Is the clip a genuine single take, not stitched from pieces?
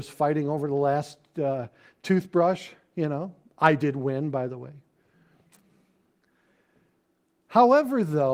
yes; 0 cuts

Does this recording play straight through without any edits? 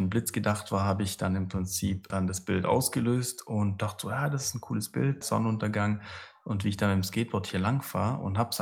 no; 2 cuts; at 2.1 s, 5.2 s

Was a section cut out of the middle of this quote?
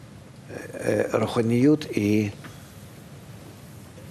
no; 0 cuts

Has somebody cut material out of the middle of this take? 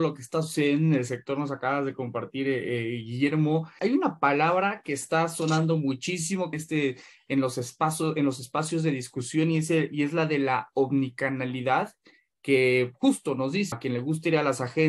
yes; 3 cuts; at 3.8 s, 6.5 s, 13.7 s

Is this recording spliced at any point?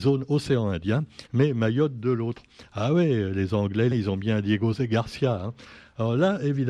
yes; 2 cuts; at 1.3 s, 3.9 s

